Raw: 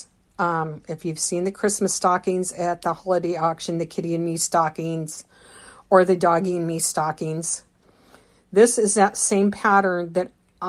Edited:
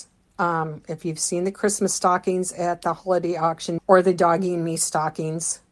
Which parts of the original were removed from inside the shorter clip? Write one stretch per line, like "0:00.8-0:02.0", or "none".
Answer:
0:03.8-0:05.8